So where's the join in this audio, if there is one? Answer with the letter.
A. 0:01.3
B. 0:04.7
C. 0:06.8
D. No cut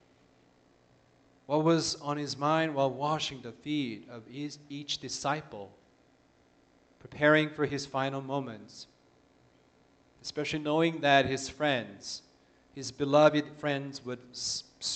A